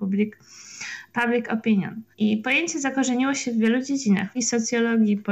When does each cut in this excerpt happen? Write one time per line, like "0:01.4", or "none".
0:02.1
0:04.3

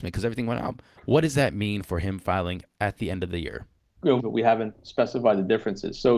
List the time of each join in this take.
0:00.9
0:04.2

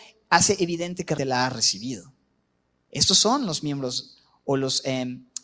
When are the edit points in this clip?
0:01.2

